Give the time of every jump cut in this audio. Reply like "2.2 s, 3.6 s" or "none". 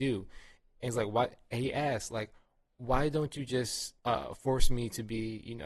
4.0 s

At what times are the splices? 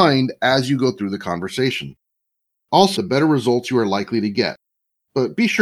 3.0 s

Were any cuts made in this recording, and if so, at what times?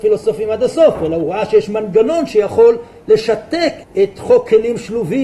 3.8 s

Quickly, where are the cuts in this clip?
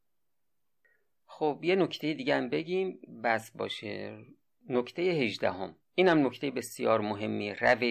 5.8 s

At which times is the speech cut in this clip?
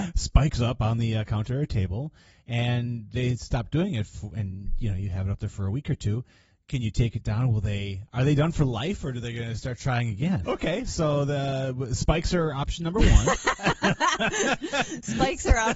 10.4 s

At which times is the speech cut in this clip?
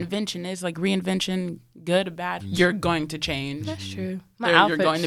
2.4 s

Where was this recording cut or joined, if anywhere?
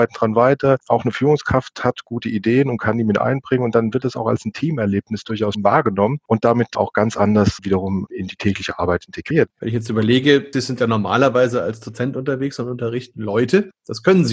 9.5 s, 10.5 s

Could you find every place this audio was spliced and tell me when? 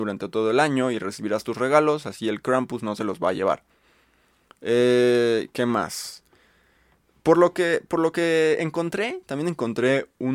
none

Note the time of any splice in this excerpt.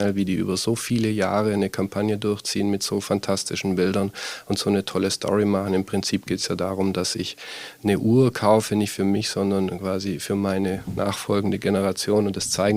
none

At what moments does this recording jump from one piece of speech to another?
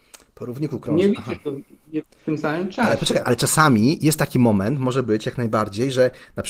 3.2 s

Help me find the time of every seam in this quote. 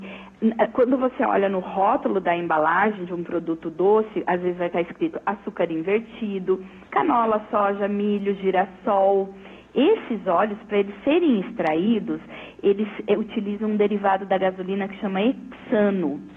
6.9 s

